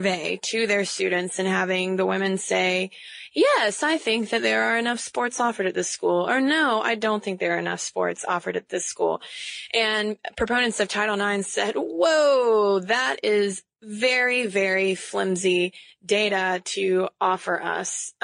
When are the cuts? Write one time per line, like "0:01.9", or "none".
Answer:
none